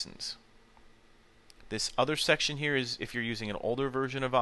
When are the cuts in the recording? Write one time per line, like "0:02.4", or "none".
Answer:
none

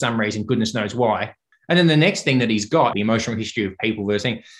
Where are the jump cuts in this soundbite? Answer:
0:01.5
0:02.9

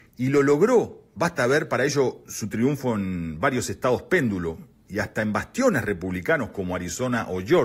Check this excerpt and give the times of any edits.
none

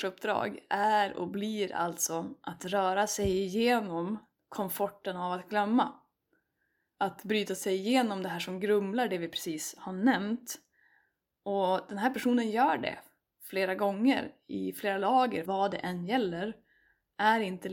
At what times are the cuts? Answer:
0:15.5

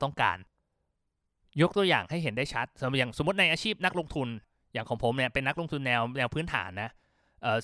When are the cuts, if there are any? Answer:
none

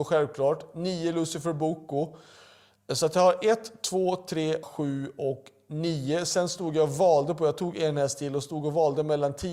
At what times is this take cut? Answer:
0:04.6

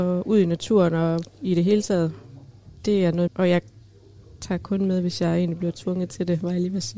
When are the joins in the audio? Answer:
0:03.3

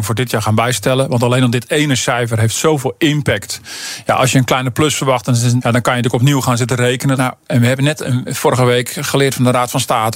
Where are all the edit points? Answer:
0:05.6
0:07.2
0:08.3

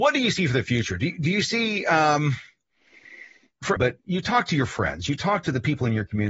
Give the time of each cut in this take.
0:03.8

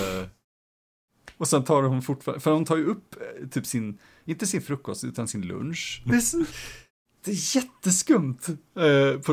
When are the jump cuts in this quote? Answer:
0:06.1

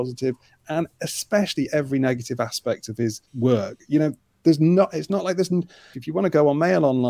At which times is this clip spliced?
0:03.3
0:05.9

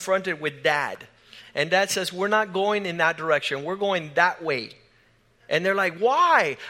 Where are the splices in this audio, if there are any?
none

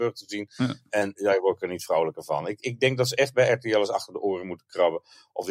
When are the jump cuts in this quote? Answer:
none

